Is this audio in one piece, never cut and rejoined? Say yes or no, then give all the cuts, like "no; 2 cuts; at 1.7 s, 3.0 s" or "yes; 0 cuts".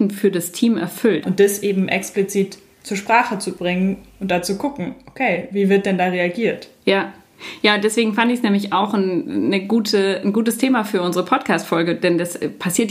no; 1 cut; at 1.2 s